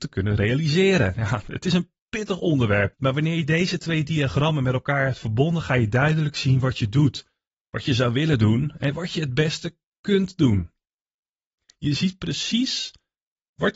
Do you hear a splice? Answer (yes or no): yes